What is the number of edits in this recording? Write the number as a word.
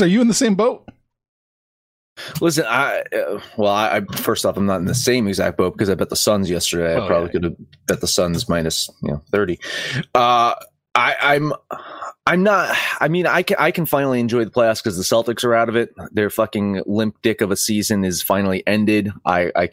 zero